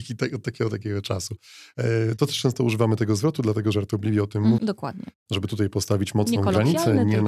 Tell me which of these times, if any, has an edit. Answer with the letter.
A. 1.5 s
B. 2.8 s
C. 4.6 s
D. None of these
C